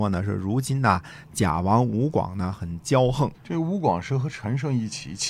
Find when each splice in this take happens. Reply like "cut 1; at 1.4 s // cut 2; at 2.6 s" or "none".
cut 1; at 3.3 s